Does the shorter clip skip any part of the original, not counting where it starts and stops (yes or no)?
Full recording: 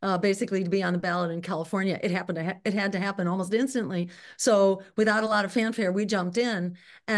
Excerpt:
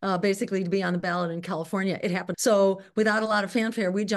yes